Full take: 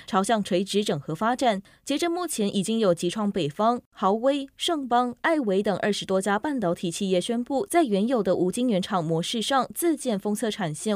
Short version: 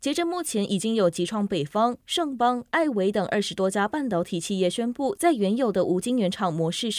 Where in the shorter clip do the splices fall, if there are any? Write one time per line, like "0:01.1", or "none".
0:02.0